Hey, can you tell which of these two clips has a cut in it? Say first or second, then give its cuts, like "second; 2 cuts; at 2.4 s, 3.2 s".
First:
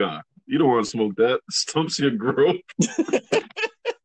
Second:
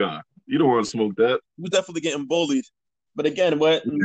second; 1 cut; at 1.4 s